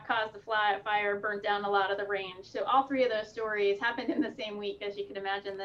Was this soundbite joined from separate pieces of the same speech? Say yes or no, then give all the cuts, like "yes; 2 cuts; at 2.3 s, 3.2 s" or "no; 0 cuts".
no; 0 cuts